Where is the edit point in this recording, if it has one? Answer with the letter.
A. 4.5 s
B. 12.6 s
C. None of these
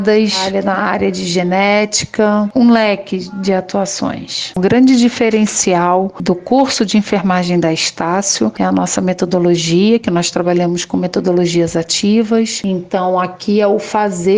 A